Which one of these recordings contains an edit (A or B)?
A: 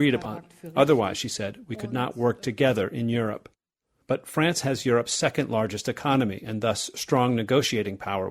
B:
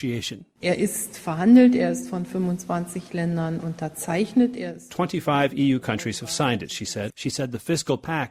B